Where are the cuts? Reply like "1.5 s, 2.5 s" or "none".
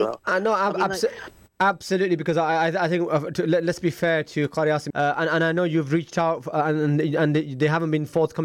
4.9 s

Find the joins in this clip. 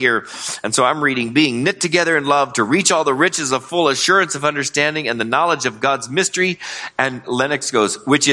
none

